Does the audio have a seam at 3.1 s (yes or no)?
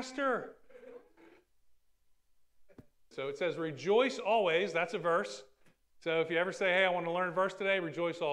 yes